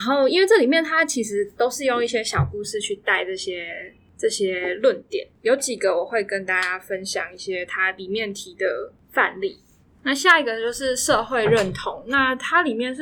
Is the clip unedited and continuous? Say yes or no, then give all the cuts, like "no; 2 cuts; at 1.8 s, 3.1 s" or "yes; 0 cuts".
yes; 0 cuts